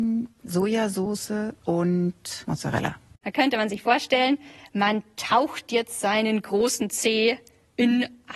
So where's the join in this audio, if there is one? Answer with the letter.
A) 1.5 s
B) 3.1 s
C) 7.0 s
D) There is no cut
B